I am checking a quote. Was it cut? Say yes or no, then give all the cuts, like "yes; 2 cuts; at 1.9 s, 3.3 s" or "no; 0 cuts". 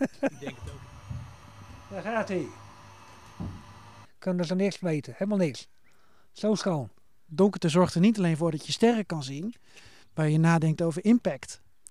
yes; 3 cuts; at 4.0 s, 7.3 s, 10.0 s